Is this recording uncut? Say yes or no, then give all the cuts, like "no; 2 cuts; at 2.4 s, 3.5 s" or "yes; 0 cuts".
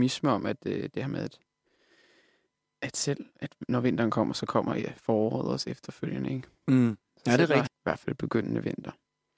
no; 1 cut; at 7.7 s